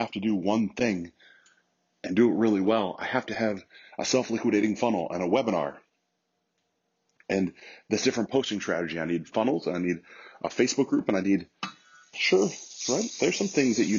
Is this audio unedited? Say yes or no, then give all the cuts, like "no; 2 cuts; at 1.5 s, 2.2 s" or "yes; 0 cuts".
no; 1 cut; at 12.1 s